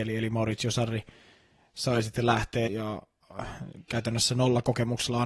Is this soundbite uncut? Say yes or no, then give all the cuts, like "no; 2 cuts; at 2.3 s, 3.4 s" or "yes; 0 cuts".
no; 1 cut; at 2.7 s